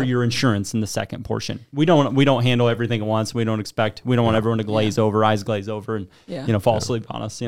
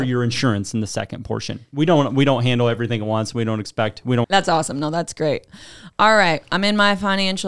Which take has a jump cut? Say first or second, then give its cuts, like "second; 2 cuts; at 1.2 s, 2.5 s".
second; 1 cut; at 4.2 s